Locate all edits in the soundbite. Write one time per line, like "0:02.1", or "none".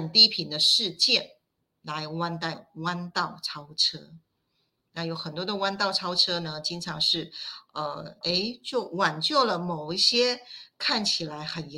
0:08.2